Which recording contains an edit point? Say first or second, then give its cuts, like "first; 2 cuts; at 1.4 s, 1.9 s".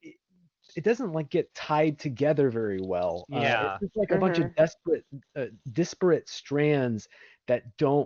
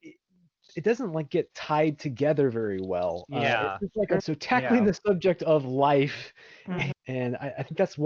second; 2 cuts; at 4.2 s, 6.9 s